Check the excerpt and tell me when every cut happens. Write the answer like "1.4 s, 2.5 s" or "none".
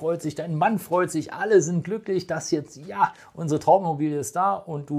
none

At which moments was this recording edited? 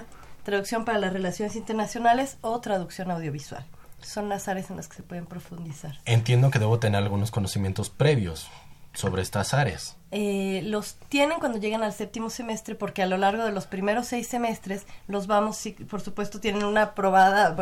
none

